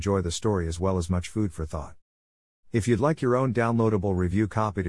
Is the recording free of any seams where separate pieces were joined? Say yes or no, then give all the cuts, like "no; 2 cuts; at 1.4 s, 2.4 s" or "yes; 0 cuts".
yes; 0 cuts